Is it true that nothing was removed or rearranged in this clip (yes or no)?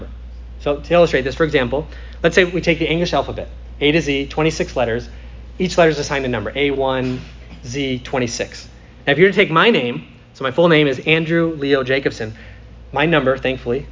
yes